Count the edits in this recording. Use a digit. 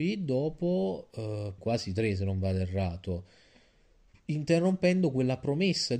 1